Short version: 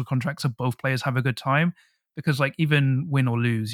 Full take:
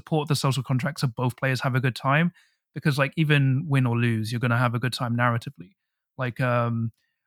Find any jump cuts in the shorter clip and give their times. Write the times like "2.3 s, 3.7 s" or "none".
none